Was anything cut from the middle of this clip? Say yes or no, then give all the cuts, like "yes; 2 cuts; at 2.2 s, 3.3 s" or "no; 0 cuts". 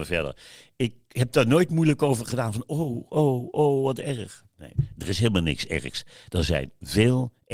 no; 0 cuts